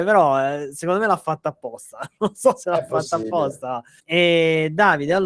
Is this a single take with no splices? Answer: no; 1 cut; at 4.0 s

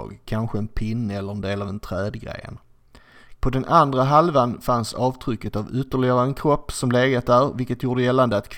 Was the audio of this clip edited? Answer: yes; 1 cut; at 3.4 s

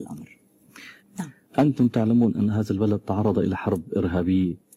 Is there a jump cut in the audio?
yes; 1 cut; at 1.0 s

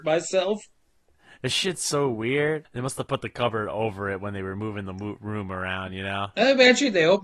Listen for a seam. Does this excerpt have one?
yes; 1 cut; at 2.6 s

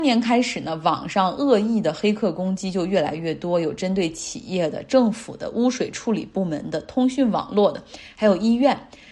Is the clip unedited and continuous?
yes; 0 cuts

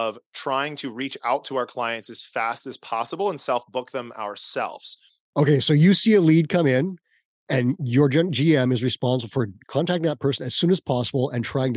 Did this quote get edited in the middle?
yes; 2 cuts; at 5.2 s, 9.6 s

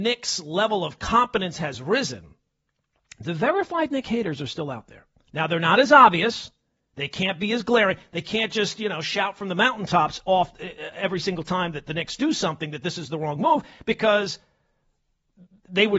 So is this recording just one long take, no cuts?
yes; 0 cuts

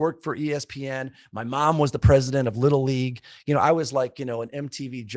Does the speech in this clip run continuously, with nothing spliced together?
yes; 0 cuts

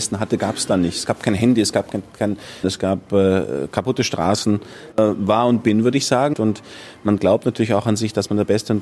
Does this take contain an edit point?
yes; 3 cuts; at 2.6 s, 4.9 s, 6.3 s

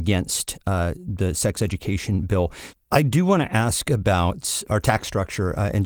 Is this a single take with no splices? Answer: no; 2 cuts; at 2.7 s, 4.6 s

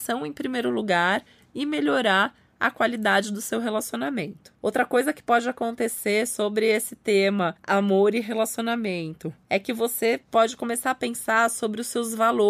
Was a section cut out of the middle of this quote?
no; 0 cuts

